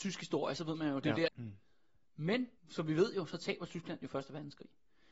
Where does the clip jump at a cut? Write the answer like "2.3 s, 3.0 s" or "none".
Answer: 1.3 s, 2.6 s